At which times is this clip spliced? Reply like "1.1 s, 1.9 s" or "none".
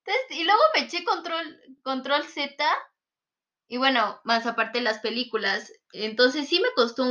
none